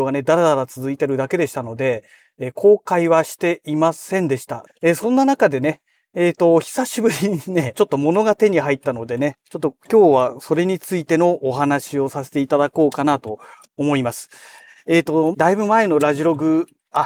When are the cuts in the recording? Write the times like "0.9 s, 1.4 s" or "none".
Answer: 4.7 s, 7.7 s, 15.3 s